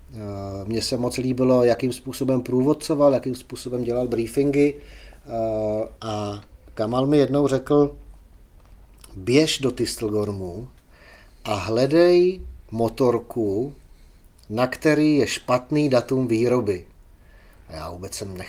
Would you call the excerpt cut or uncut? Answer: cut